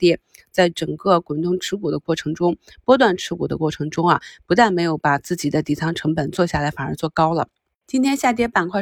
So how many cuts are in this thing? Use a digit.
1